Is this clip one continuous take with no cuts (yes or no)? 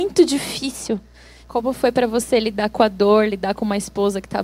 no